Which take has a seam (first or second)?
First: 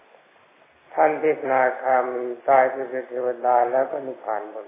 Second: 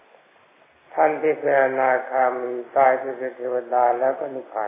first